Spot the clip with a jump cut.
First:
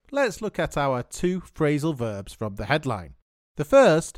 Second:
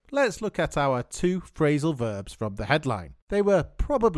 second; 1 cut; at 3.2 s

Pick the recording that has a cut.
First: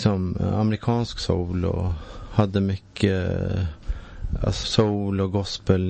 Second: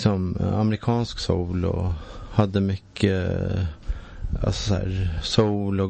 first; 1 cut; at 4.6 s

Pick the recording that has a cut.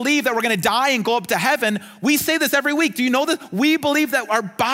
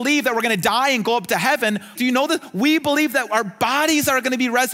second; 1 cut; at 2.0 s

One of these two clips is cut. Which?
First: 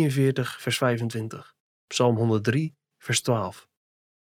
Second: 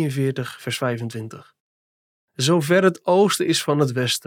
first; 1 cut; at 1.7 s

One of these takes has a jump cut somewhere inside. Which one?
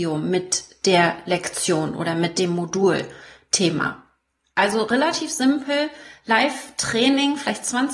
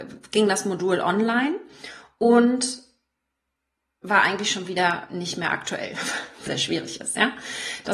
second; 1 cut; at 6.5 s

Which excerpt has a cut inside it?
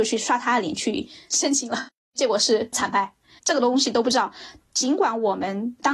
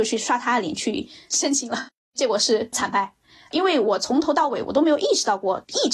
first; 1 cut; at 3.4 s

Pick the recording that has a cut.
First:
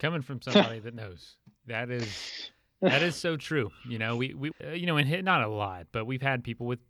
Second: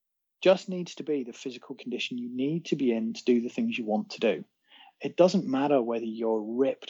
first; 1 cut; at 4.5 s

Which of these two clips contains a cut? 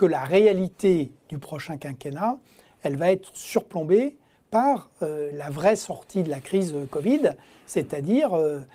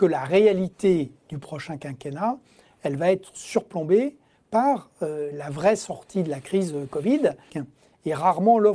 second; 1 cut; at 7.5 s

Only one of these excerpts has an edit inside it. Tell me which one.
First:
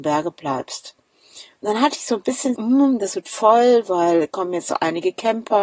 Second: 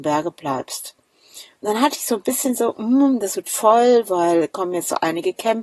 first; 1 cut; at 2.5 s

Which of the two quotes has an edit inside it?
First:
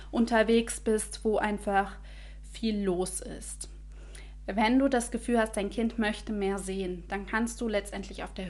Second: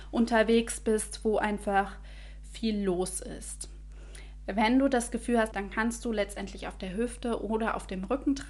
second; 1 cut; at 5.5 s

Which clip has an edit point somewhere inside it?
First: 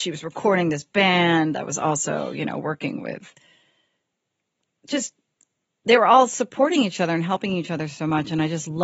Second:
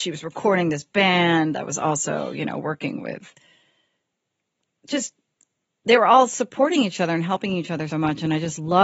second; 1 cut; at 7.9 s

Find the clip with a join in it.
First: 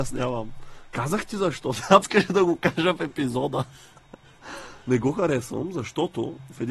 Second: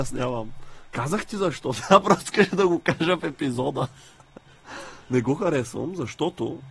first; 1 cut; at 2.0 s

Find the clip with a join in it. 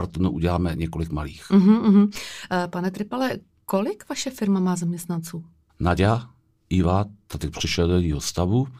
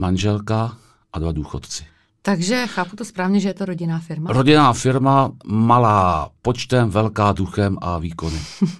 first; 1 cut; at 6.6 s

